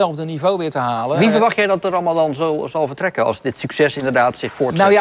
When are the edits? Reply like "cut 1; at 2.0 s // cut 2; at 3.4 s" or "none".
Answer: none